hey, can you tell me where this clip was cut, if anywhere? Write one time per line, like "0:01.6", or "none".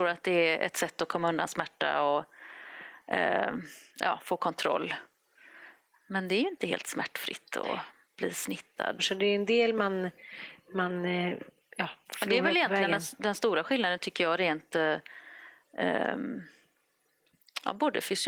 0:09.0